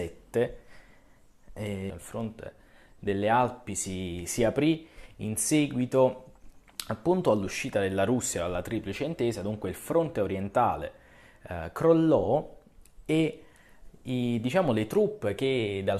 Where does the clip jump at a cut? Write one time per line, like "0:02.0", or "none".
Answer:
0:01.9